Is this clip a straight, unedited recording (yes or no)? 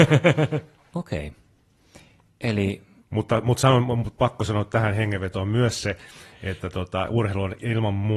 no